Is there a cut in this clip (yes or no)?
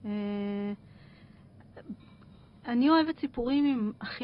no